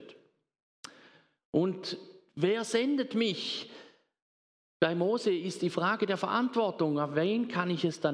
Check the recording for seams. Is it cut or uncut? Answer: uncut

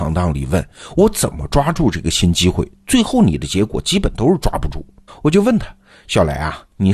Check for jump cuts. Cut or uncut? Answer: cut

